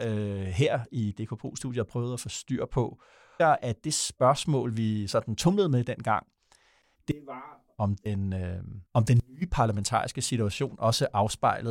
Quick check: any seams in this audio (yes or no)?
yes